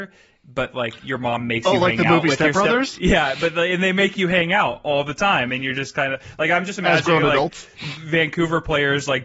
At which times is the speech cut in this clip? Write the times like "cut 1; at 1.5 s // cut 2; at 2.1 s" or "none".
none

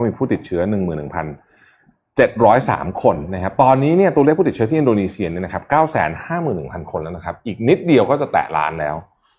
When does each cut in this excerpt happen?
none

